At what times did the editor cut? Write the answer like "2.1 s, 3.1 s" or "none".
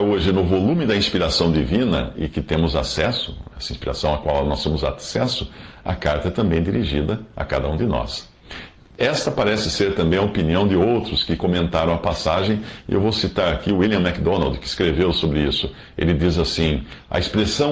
none

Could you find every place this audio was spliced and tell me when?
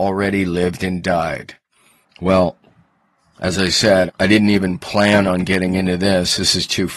2.0 s, 4.1 s

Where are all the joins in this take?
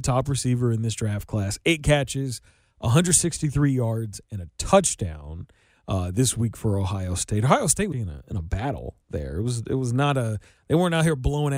7.9 s

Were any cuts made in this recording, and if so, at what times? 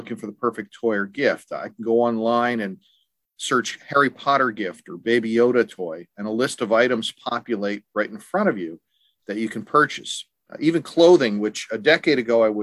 none

